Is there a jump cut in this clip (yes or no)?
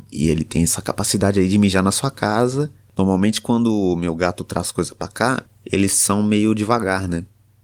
yes